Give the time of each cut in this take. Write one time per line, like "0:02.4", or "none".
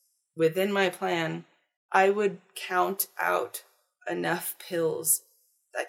0:01.8